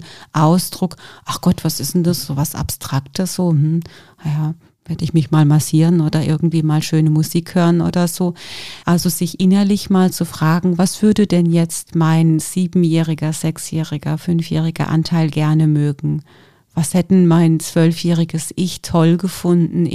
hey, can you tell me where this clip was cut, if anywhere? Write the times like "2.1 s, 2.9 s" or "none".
8.8 s